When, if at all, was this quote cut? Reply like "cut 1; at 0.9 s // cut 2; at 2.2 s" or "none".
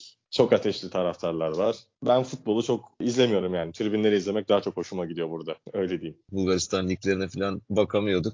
cut 1; at 6.3 s